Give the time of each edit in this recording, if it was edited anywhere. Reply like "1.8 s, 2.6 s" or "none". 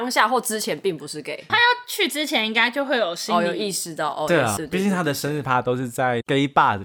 1.5 s, 4.6 s

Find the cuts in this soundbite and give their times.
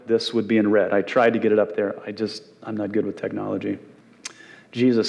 none

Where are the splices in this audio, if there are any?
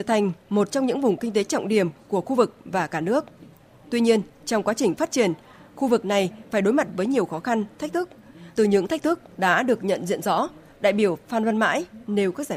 8.5 s

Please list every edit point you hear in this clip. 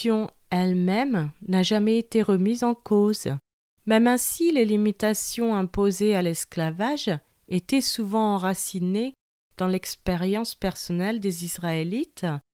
3.8 s

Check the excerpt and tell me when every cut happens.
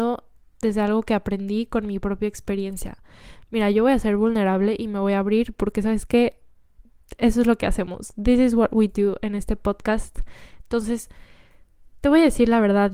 none

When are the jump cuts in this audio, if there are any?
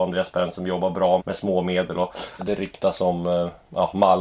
1.2 s, 2.4 s

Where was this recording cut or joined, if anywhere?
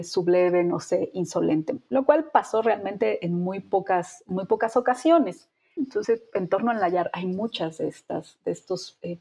5.8 s

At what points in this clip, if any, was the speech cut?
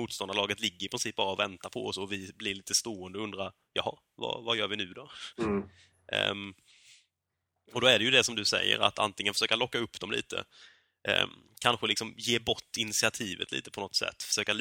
none

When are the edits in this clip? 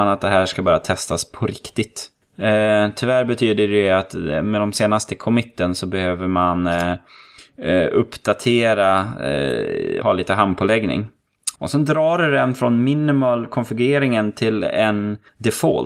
10.0 s, 11.5 s

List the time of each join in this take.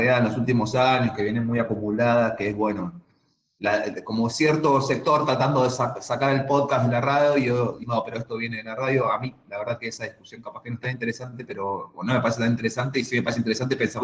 7.8 s

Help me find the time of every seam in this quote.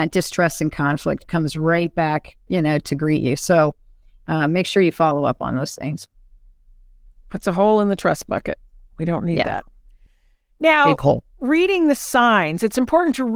2.5 s

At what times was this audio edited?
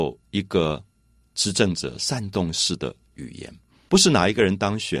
3.9 s

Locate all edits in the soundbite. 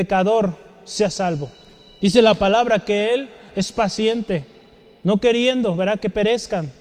none

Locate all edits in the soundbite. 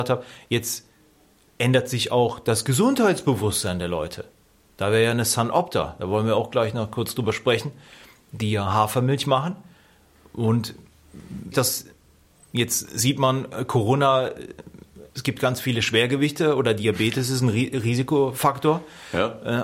11.5 s, 15.1 s

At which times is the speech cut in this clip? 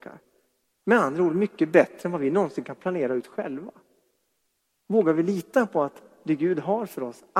none

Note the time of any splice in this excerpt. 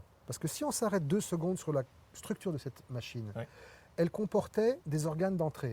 4.8 s

